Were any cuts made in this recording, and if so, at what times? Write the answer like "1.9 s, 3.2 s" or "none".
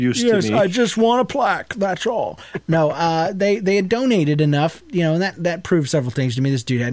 none